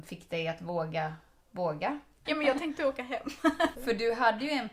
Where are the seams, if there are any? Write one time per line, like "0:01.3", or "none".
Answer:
0:02.3
0:03.7